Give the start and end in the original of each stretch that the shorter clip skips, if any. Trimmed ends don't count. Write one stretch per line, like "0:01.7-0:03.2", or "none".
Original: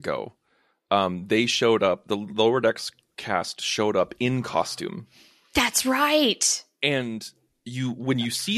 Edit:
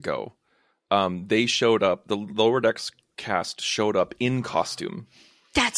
none